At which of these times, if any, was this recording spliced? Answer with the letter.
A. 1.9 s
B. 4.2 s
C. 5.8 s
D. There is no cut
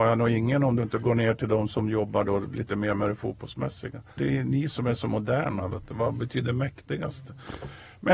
B